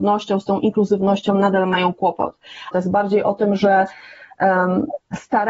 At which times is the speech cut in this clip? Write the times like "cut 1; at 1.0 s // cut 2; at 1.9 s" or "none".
cut 1; at 2.7 s